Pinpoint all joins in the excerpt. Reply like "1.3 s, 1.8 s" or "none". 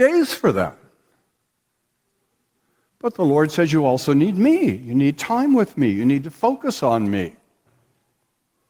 none

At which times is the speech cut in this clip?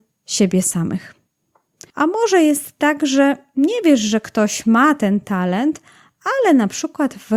1.9 s

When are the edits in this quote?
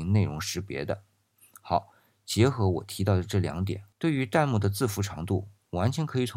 3.9 s

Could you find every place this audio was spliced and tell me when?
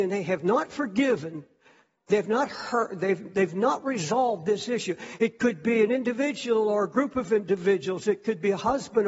2.0 s, 5.2 s

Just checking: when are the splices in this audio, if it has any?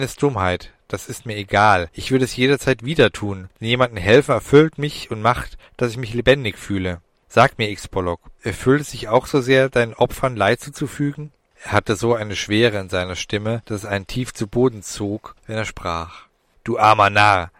11.5 s, 16.5 s

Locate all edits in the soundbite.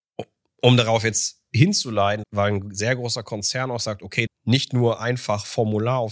2.2 s, 4.3 s

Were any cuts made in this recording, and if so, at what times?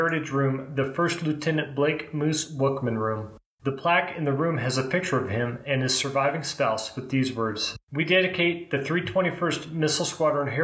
3.5 s, 7.8 s

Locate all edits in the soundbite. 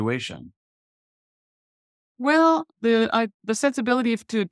3.3 s

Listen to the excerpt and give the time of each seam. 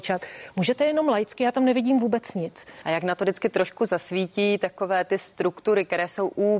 2.8 s

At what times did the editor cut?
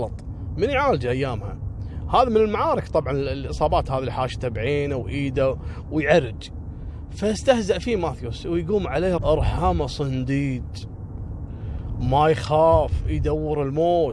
9.2 s

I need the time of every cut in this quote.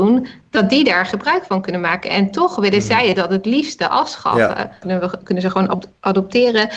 4.8 s

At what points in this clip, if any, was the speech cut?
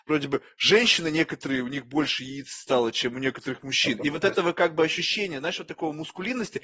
none

